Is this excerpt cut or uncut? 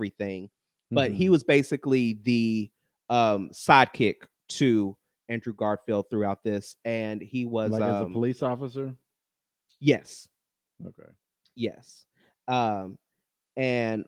uncut